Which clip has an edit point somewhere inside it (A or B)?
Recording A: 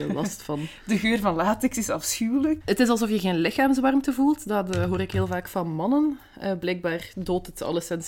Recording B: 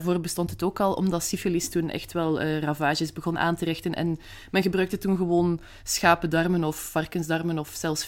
A